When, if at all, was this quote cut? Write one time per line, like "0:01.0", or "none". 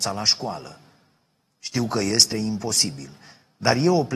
0:02.3